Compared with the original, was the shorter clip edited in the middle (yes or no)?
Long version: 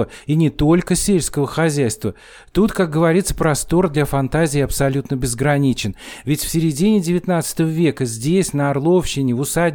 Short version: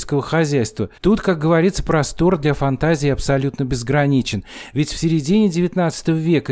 yes